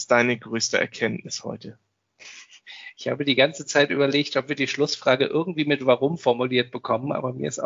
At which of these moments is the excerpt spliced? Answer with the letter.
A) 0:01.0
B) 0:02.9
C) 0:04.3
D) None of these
D